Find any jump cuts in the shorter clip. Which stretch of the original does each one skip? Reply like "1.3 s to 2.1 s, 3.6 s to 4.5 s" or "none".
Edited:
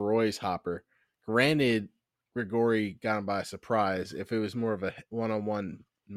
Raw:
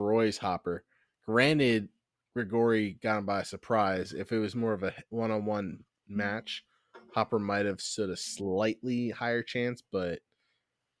none